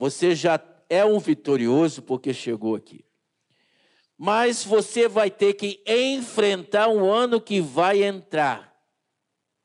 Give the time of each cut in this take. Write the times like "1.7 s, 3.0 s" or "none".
none